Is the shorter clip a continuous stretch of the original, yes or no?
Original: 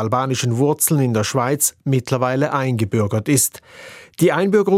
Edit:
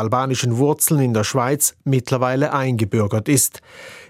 yes